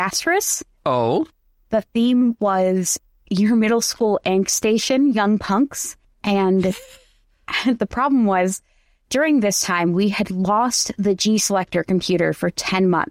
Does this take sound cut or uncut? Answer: uncut